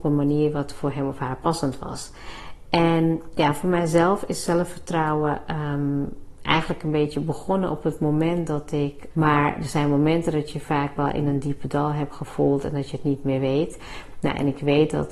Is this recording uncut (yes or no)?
no